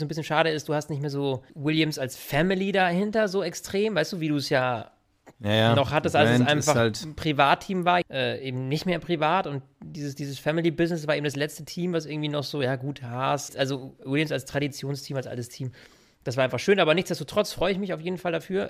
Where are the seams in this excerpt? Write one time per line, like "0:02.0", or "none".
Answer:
0:01.5
0:08.0
0:13.5